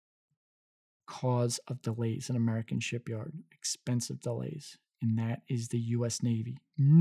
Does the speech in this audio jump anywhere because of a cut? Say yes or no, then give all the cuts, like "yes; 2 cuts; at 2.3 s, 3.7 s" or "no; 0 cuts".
no; 0 cuts